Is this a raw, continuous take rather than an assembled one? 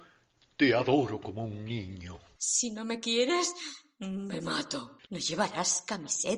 no; 2 cuts; at 2.4 s, 5.1 s

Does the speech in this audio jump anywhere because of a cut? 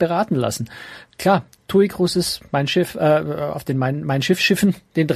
no; 0 cuts

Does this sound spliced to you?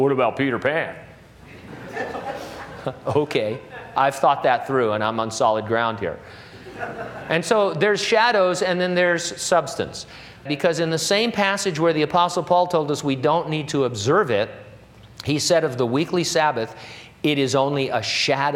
yes; 1 cut; at 10.5 s

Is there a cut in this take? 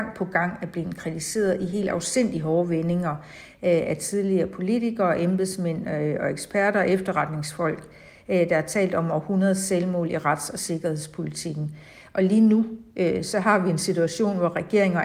no; 0 cuts

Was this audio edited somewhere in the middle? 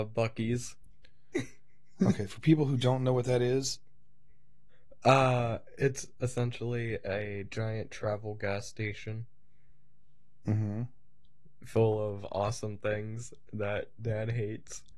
no; 0 cuts

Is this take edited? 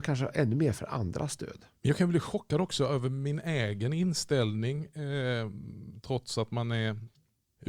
no; 0 cuts

